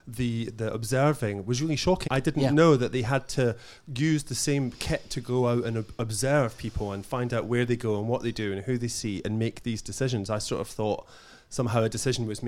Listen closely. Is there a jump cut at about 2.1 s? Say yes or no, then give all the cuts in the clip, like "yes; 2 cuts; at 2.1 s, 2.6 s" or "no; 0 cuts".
yes; 1 cut; at 2.1 s